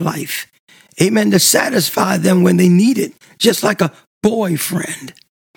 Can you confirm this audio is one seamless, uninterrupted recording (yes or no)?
yes